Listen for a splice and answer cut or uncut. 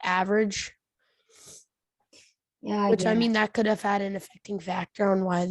uncut